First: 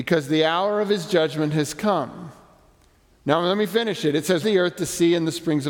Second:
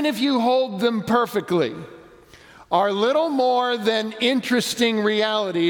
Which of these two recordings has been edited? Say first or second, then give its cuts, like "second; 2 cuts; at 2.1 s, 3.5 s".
first; 1 cut; at 4.4 s